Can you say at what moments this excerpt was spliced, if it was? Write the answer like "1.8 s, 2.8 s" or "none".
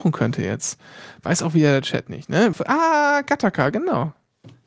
2.5 s